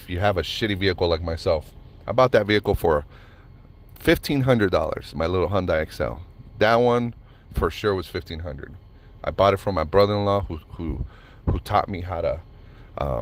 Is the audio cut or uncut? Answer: uncut